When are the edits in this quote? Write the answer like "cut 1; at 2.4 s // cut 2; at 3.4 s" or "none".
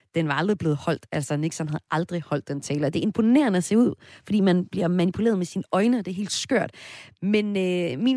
none